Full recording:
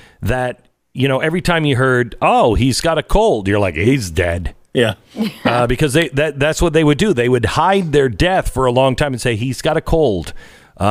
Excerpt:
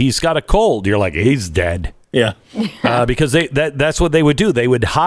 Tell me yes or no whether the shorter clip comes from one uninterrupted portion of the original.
yes